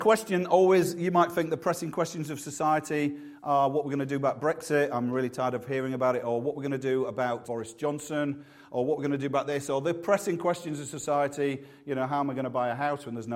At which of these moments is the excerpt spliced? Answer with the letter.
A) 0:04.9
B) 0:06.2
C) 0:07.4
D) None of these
C